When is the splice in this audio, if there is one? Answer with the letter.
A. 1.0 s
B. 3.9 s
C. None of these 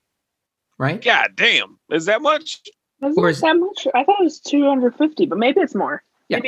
C